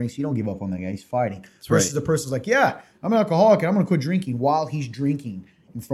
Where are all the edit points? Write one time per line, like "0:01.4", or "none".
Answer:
none